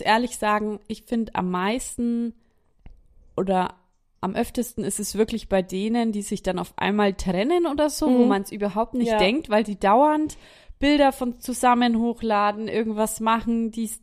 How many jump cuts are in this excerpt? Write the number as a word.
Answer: zero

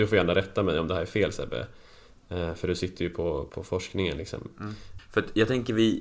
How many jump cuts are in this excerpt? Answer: two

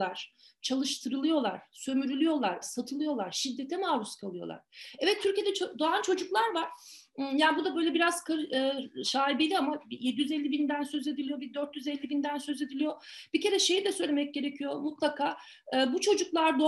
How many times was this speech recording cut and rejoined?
one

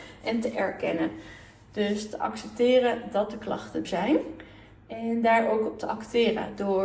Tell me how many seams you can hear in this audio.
one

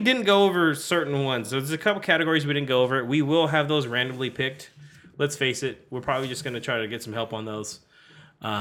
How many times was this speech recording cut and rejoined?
zero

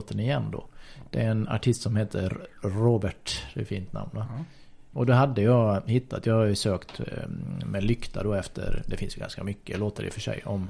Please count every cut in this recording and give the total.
one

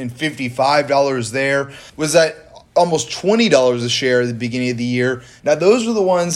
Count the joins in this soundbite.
two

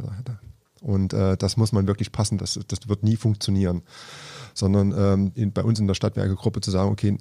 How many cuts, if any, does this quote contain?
two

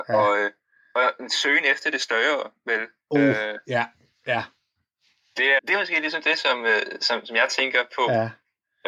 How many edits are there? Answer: one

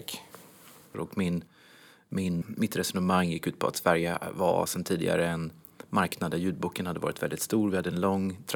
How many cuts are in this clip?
two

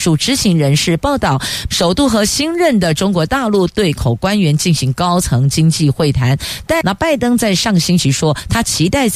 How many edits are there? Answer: two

